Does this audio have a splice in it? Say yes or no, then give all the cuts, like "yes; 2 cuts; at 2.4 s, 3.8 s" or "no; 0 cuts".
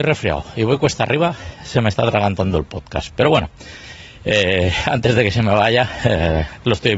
no; 0 cuts